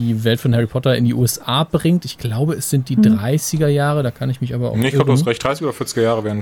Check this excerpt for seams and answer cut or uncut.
uncut